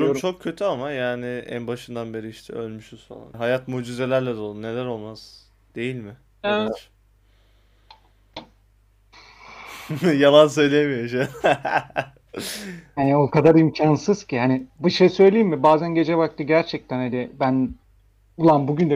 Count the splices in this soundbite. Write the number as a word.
one